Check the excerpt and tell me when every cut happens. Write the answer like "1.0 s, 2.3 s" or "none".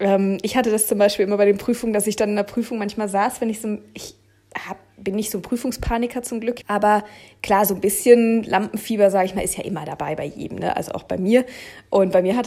6.6 s